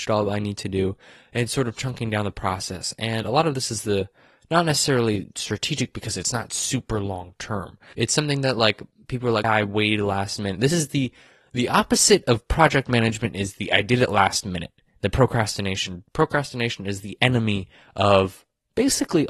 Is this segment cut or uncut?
cut